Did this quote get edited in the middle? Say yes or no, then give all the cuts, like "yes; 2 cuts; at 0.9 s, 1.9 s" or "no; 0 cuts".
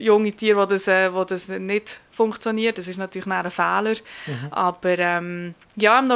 no; 0 cuts